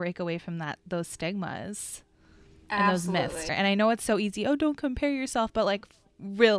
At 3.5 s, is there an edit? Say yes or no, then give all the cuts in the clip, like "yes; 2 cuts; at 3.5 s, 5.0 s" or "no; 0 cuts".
yes; 1 cut; at 3.5 s